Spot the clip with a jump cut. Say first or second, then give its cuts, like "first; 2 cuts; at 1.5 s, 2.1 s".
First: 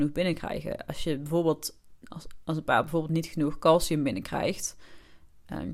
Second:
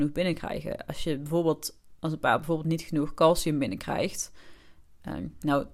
second; 1 cut; at 2.0 s